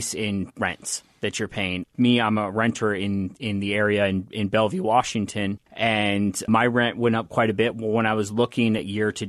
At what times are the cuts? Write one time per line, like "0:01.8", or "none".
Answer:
none